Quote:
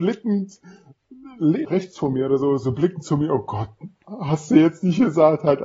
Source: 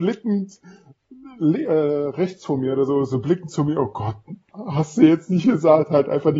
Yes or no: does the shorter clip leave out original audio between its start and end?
yes